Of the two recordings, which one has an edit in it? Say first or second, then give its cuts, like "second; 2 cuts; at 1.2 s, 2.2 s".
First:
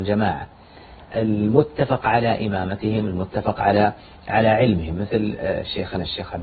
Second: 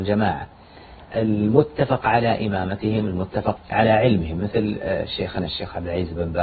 second; 1 cut; at 3.6 s